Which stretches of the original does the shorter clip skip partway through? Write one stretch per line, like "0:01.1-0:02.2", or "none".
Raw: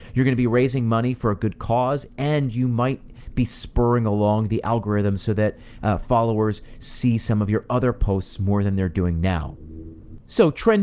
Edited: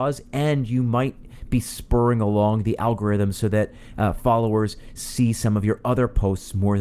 none